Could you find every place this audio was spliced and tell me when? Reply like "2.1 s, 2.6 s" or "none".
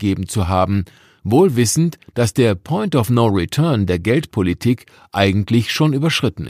none